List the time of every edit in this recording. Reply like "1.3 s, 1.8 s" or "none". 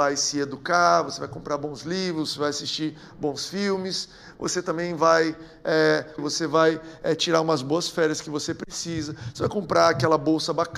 6.2 s